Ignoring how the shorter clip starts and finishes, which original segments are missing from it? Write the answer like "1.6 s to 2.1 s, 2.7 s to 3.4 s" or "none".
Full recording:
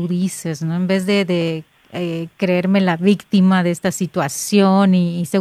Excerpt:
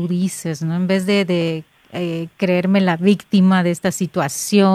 none